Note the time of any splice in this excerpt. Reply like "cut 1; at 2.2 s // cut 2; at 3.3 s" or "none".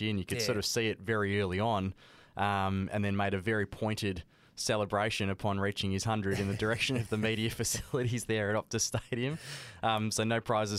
none